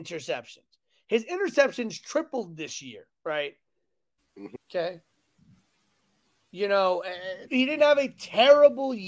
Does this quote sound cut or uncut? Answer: cut